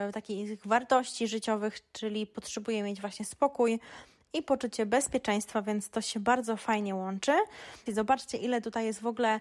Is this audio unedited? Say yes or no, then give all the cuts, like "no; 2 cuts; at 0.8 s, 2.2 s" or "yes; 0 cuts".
no; 1 cut; at 7.9 s